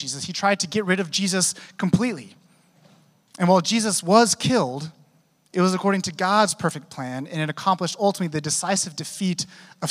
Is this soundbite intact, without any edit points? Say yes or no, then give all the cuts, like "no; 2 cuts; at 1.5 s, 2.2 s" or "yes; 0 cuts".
yes; 0 cuts